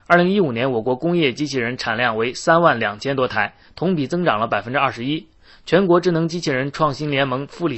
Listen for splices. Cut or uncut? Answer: uncut